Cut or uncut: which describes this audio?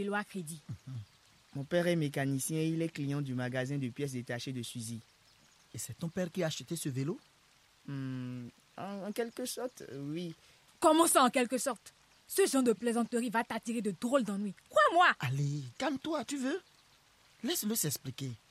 cut